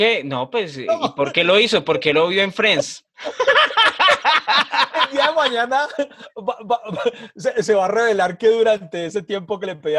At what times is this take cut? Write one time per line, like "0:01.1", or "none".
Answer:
none

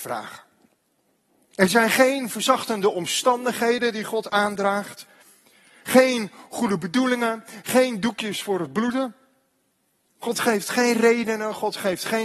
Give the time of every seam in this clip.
0:01.5

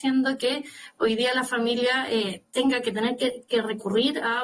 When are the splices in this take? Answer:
none

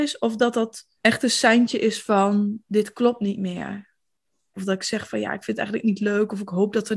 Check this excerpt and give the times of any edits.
0:01.0
0:04.5

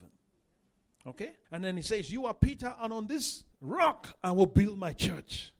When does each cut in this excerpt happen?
0:01.4
0:03.5

